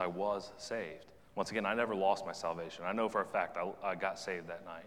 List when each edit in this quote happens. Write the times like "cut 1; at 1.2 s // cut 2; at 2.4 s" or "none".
none